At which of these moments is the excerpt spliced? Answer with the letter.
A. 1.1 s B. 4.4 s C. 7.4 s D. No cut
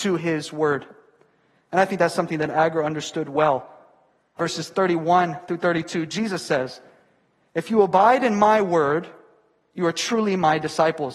B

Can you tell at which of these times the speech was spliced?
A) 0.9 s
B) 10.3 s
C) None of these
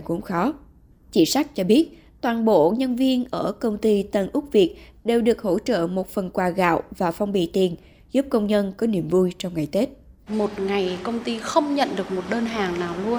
B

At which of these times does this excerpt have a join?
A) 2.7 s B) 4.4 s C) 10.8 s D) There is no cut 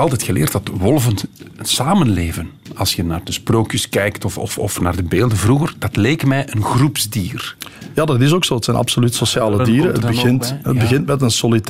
D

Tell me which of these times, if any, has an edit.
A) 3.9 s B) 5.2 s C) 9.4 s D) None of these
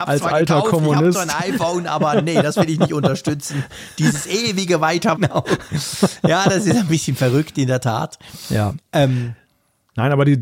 B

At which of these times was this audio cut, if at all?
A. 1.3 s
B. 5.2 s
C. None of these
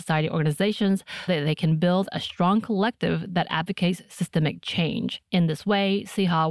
A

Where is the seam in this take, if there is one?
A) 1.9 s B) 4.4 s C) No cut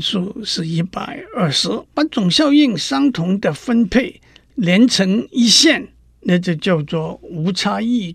A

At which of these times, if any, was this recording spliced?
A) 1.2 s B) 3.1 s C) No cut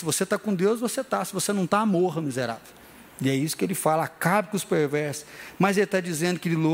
B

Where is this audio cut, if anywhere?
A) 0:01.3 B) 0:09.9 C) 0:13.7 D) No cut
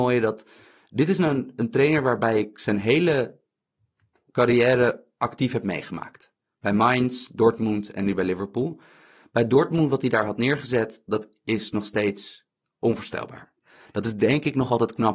D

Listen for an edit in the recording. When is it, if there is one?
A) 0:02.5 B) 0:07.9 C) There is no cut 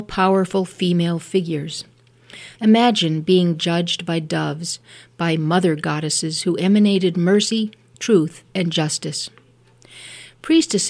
A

